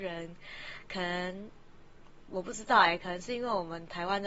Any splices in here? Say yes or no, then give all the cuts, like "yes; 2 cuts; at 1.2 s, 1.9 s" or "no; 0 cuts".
no; 0 cuts